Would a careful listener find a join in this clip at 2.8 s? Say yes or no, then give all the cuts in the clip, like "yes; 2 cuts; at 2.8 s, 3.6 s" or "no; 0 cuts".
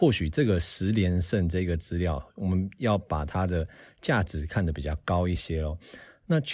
no; 1 cut; at 5.4 s